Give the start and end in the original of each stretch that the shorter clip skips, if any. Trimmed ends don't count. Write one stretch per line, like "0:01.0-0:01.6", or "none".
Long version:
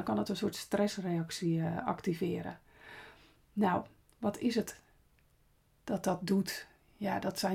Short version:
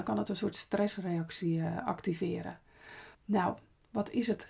0:03.1-0:03.4